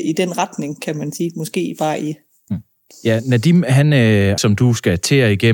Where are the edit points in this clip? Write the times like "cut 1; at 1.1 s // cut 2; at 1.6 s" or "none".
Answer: cut 1; at 2.9 s // cut 2; at 4.4 s